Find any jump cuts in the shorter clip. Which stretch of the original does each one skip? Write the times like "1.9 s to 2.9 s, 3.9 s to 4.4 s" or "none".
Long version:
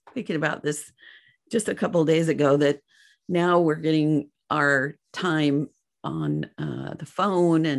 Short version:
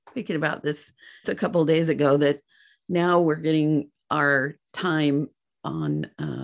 1.2 s to 1.6 s